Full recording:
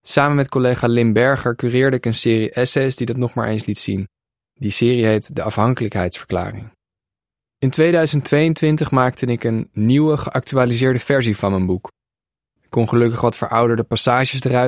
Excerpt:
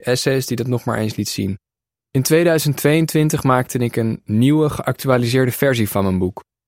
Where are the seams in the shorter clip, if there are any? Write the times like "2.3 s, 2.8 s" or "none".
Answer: 2.0 s